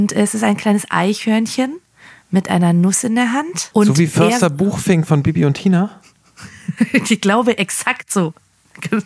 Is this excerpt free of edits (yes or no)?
no